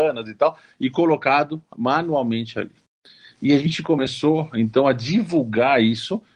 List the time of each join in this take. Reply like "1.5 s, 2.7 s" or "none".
none